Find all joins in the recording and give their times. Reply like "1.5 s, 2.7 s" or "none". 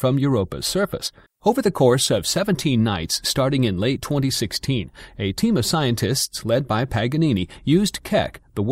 1.3 s